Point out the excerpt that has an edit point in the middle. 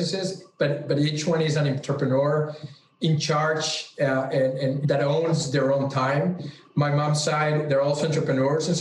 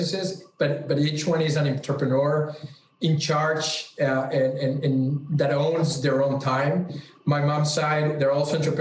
first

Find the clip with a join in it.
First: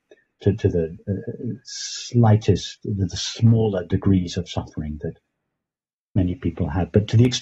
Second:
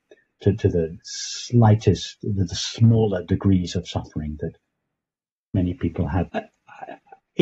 second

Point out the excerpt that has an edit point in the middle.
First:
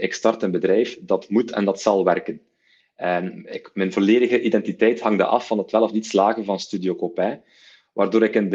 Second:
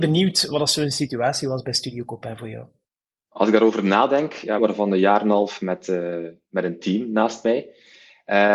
second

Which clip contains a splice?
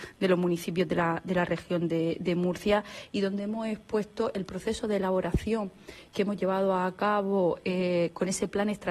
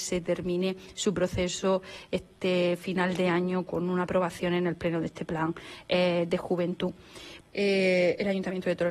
second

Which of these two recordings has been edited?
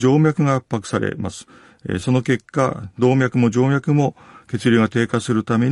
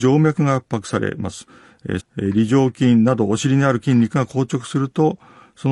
second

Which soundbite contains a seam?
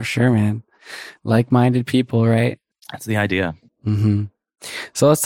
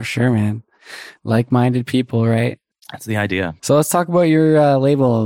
second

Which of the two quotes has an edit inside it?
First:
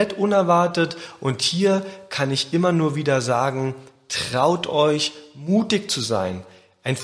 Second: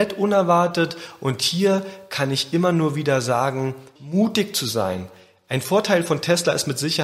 second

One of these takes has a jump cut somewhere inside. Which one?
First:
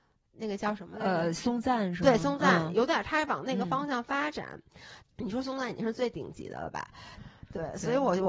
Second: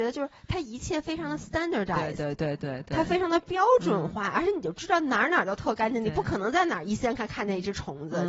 first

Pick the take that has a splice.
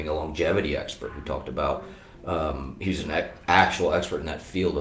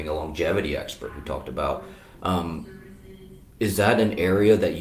second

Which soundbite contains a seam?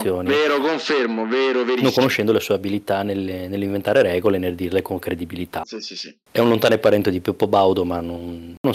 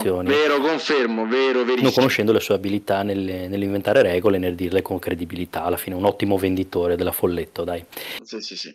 first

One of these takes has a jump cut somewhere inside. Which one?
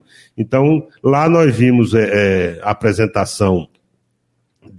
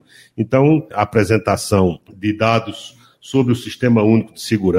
second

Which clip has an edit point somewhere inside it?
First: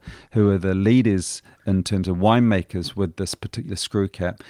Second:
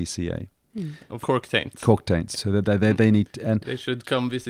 second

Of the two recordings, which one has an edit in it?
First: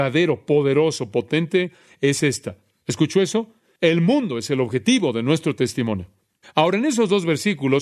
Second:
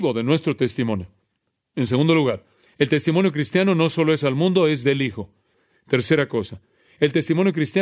first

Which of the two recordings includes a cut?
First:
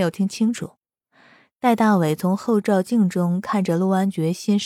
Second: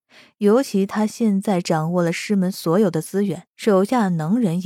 second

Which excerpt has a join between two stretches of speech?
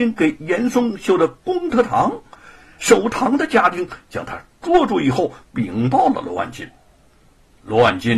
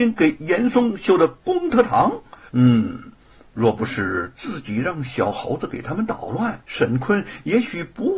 second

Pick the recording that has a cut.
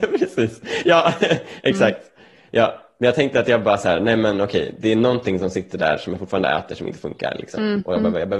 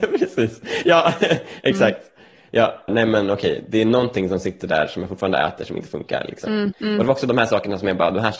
second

